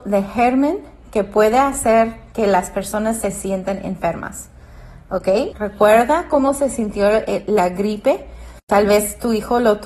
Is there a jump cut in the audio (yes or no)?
yes